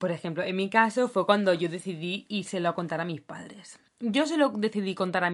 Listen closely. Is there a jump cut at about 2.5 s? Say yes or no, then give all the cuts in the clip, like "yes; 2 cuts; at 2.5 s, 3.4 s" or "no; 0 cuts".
no; 1 cut; at 3.9 s